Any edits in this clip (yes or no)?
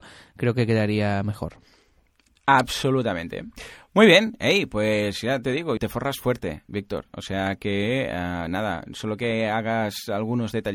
yes